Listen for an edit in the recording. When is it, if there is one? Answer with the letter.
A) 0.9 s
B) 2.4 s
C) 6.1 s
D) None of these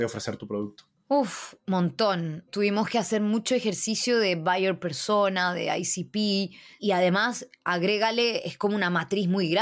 D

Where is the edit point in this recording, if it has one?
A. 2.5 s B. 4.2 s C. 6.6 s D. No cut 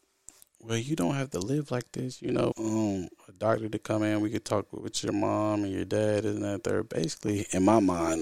A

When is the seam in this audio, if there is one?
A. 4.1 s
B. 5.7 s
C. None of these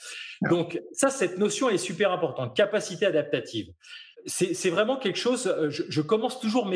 A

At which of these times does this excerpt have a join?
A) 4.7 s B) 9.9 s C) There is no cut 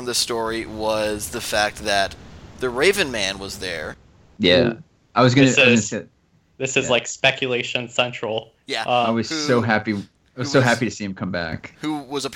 C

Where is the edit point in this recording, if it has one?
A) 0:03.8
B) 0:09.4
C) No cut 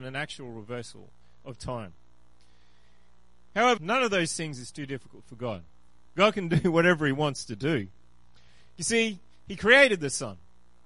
A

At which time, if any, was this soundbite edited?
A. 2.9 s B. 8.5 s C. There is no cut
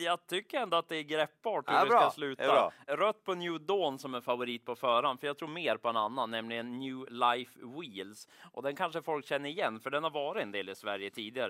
A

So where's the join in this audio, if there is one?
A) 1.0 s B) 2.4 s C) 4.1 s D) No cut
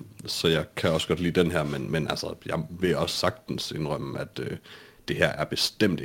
D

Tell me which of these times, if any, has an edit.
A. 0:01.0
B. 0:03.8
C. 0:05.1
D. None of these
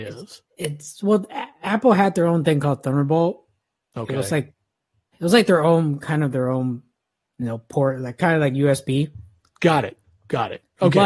C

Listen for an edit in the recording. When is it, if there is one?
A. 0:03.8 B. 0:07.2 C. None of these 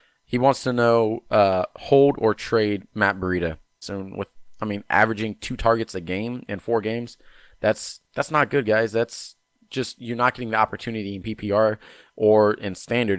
A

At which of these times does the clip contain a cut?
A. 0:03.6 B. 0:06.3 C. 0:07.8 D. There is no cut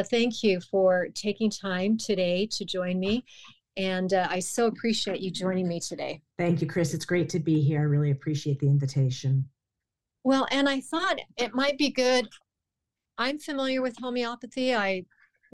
B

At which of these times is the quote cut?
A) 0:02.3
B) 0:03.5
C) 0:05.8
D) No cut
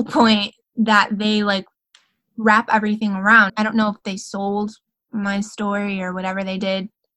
B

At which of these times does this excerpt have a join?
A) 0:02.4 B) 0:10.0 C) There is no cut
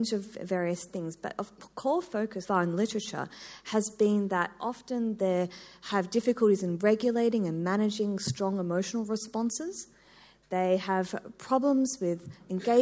A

